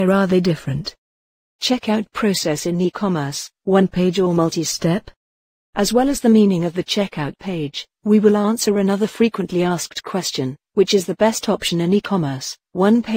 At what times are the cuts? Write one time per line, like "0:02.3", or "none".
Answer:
none